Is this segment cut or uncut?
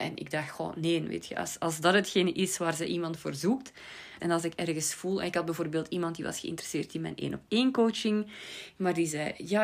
cut